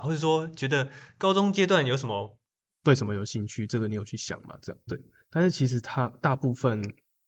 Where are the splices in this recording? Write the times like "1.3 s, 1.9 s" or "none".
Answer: 2.7 s, 4.9 s